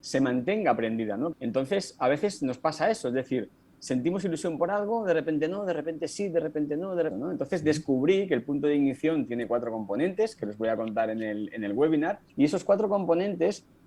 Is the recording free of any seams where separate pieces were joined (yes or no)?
no